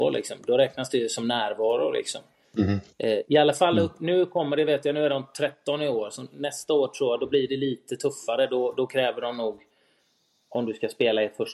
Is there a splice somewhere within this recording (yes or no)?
no